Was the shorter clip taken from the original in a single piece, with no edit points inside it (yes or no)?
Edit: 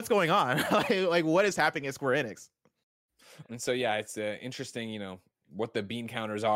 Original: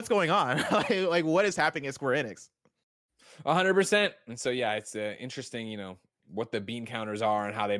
no